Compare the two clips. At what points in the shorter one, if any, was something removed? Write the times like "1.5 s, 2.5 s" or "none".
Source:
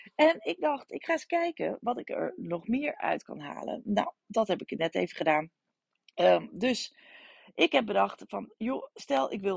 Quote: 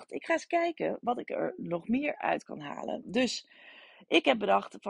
3.0 s

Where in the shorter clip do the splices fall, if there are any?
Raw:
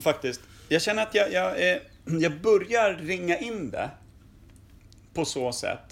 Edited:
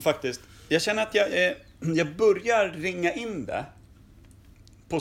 1.3 s

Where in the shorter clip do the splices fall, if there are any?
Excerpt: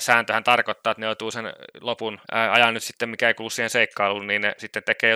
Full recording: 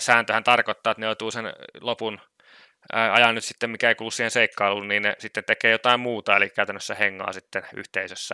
2.2 s

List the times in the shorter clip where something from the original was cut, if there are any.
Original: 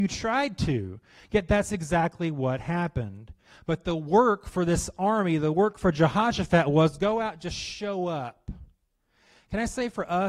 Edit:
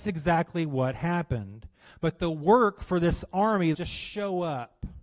3.7 s

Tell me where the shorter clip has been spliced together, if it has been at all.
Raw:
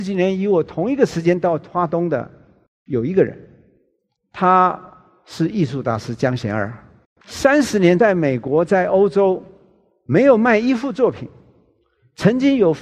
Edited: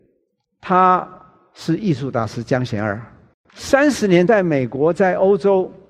none

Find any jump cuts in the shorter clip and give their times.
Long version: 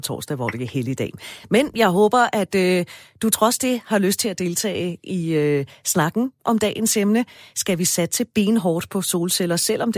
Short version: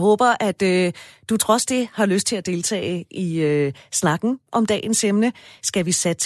none

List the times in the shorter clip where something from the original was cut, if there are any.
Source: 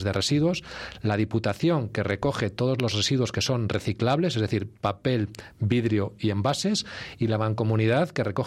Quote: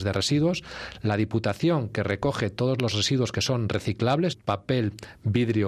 4.3 s

